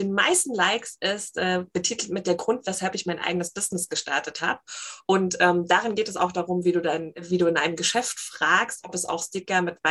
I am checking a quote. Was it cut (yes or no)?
no